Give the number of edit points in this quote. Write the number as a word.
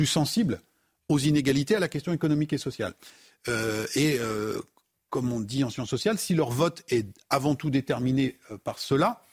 zero